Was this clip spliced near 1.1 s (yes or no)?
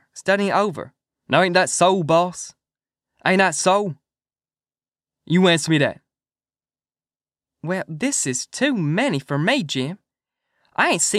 yes